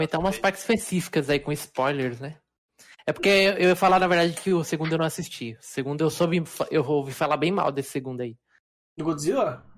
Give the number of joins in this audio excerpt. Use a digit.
0